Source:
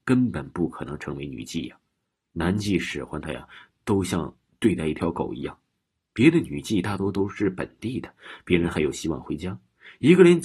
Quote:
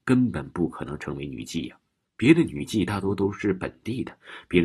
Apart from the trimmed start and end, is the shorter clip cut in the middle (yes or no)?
yes